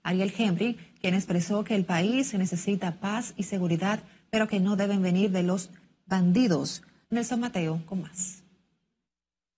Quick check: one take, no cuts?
no; 1 cut; at 7.0 s

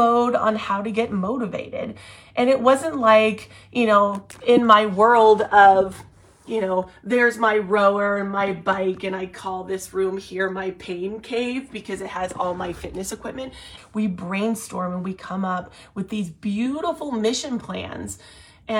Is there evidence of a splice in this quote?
yes; 1 cut; at 13.8 s

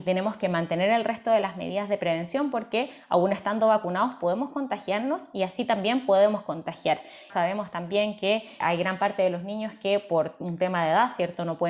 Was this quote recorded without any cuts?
no; 2 cuts; at 7.3 s, 8.6 s

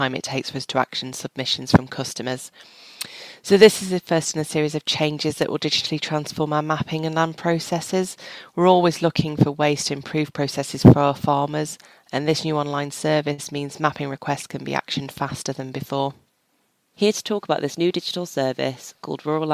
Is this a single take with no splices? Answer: no; 2 cuts; at 3.4 s, 16.9 s

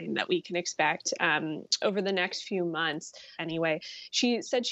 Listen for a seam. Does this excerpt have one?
yes; 1 cut; at 3.4 s

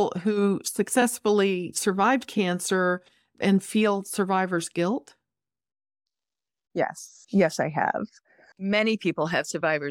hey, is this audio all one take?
yes; 0 cuts

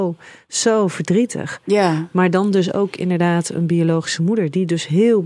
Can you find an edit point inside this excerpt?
no; 0 cuts

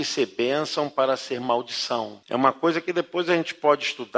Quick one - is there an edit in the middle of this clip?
yes; 1 cut; at 2.2 s

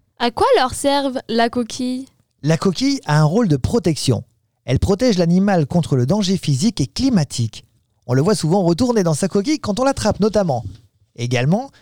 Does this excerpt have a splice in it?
no; 0 cuts

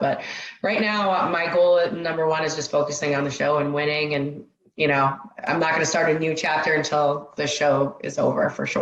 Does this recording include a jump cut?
no; 0 cuts

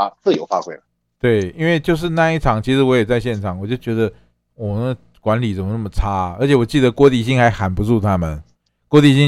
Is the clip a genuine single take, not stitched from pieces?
yes; 0 cuts

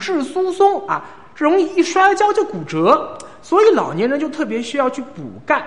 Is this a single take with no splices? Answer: yes; 0 cuts

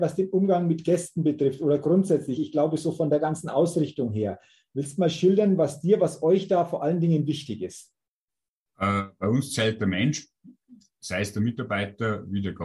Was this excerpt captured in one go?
yes; 0 cuts

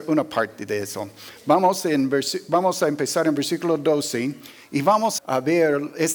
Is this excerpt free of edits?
no; 1 cut; at 5.2 s

